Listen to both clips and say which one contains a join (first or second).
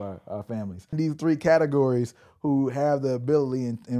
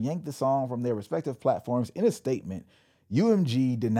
first